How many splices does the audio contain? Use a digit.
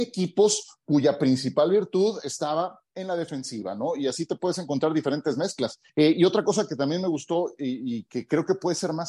1